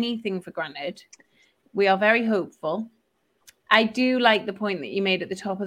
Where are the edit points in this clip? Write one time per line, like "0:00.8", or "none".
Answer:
none